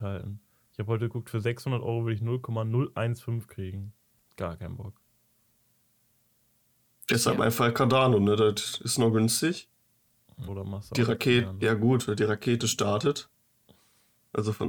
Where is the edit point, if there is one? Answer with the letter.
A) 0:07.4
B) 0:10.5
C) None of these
B